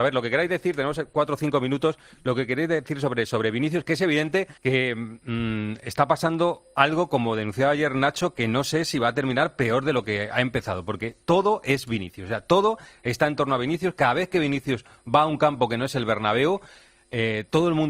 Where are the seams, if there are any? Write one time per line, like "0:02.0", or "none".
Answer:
0:04.6